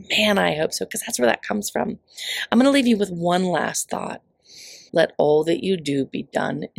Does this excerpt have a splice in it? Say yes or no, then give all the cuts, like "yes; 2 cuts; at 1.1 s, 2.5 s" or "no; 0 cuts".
yes; 1 cut; at 4.9 s